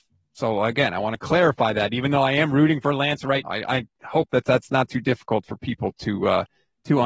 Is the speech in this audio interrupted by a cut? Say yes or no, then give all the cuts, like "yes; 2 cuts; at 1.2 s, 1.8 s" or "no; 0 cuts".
yes; 1 cut; at 3.4 s